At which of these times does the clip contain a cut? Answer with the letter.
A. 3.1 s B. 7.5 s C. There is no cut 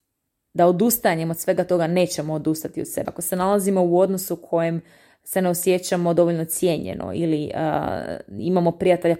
A